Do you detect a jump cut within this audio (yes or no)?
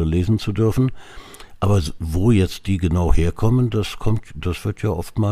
no